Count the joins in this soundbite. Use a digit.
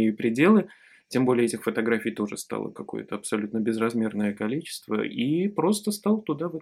1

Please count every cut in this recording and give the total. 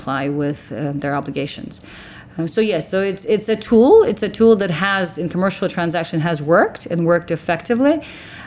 0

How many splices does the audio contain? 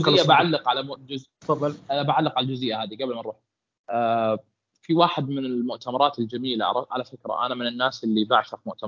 0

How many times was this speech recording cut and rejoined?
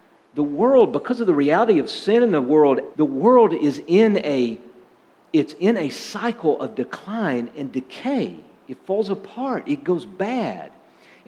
1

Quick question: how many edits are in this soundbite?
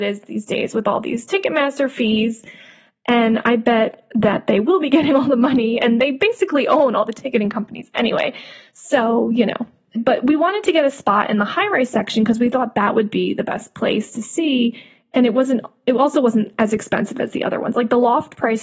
1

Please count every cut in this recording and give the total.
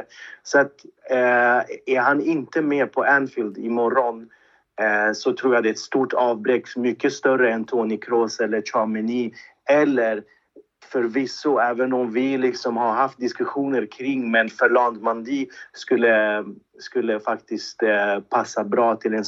0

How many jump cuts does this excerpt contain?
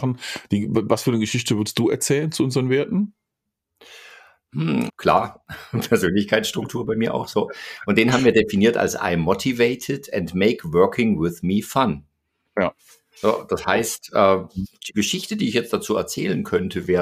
1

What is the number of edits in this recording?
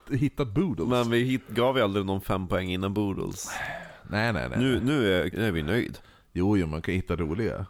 1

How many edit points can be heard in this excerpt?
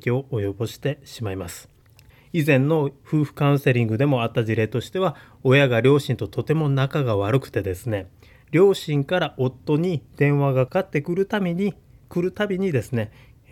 2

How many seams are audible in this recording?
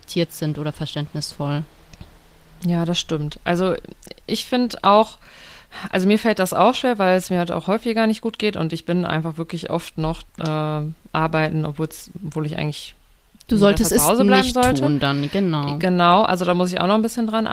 1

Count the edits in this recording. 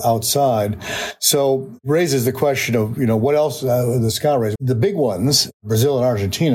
1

